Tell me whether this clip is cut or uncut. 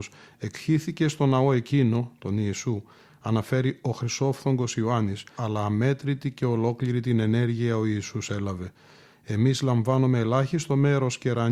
cut